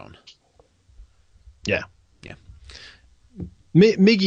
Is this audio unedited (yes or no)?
yes